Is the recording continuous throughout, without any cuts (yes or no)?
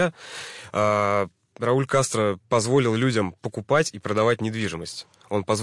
yes